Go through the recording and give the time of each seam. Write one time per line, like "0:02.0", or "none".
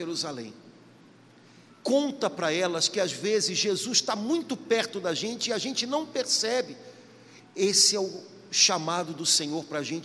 0:01.7
0:07.4